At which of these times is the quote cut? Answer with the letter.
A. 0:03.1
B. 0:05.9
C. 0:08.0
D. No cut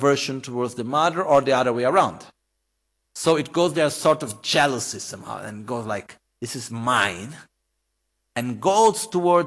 D